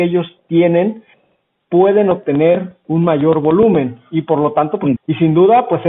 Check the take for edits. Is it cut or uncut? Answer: cut